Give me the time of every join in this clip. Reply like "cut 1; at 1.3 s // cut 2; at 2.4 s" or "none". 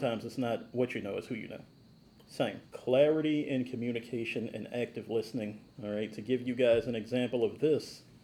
cut 1; at 2.7 s // cut 2; at 5.7 s